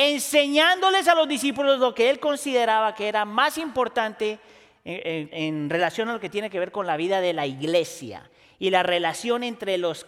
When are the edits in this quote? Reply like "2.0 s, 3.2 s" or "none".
5.3 s

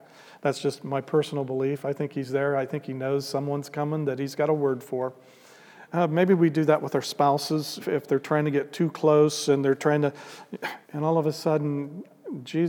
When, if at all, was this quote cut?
5.9 s, 7.8 s, 10.8 s

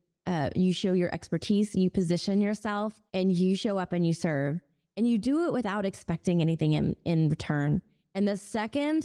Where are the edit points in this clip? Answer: 3.1 s

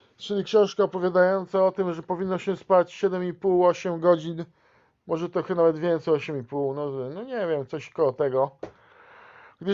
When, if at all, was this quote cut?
none

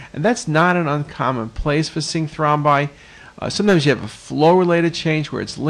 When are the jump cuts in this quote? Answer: none

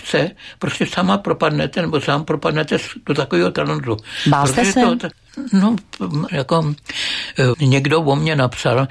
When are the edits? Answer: 5.1 s, 6.3 s, 7.5 s

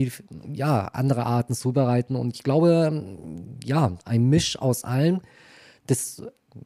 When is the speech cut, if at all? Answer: none

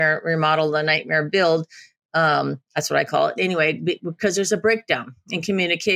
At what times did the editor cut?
none

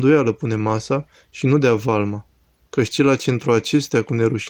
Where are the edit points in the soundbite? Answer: 2.7 s

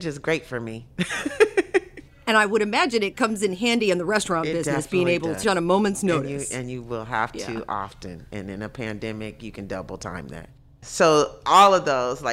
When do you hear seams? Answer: 5.4 s, 10.8 s

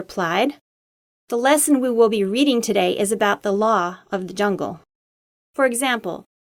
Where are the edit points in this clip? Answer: 5.3 s

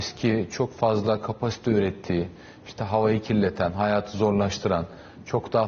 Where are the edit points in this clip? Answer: none

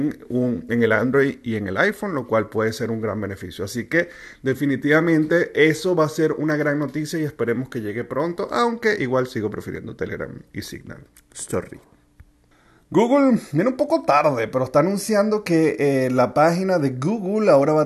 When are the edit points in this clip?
none

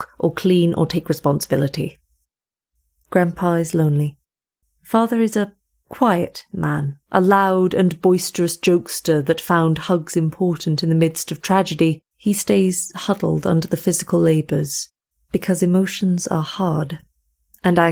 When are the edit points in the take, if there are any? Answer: 4.6 s, 7.0 s

